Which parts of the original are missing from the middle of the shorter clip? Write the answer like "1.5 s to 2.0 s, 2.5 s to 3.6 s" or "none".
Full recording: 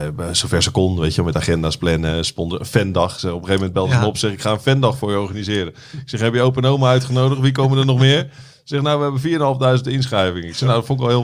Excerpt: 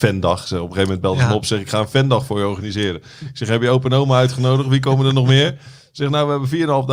none